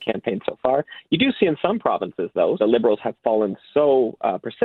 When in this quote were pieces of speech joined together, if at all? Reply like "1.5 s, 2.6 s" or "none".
2.6 s